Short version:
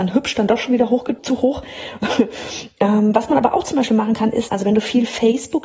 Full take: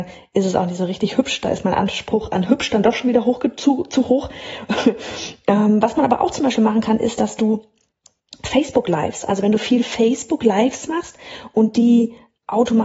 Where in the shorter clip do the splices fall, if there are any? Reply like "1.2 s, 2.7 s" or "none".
1.2 s, 4.5 s